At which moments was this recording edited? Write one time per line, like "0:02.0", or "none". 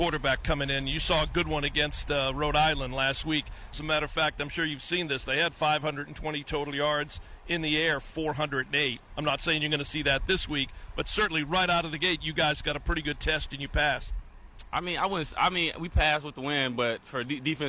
0:03.7